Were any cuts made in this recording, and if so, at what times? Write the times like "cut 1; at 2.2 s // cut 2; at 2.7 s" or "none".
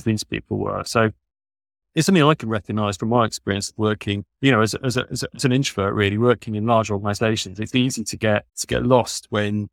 cut 1; at 8.5 s